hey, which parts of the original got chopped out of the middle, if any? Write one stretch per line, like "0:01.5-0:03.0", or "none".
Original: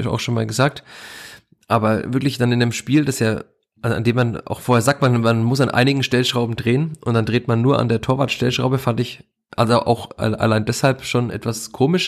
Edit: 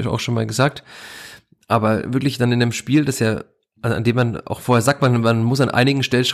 none